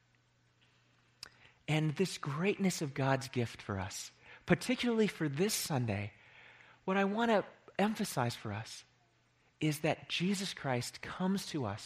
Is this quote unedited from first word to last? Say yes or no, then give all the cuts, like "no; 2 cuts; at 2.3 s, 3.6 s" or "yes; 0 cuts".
yes; 0 cuts